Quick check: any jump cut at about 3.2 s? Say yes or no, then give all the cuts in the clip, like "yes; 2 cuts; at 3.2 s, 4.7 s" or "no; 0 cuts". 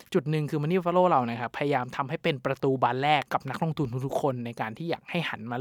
yes; 1 cut; at 3.2 s